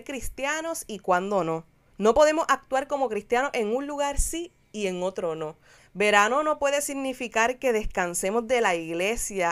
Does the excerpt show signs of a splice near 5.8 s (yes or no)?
yes